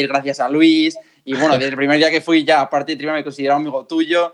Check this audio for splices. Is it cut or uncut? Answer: uncut